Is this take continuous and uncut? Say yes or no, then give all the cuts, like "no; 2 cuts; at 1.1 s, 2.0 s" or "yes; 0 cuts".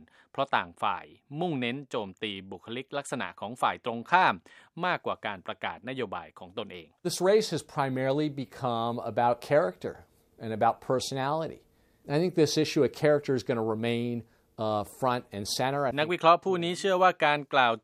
no; 1 cut; at 15.9 s